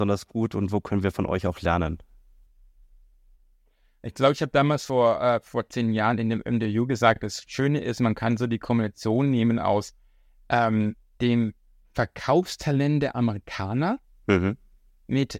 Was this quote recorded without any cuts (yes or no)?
yes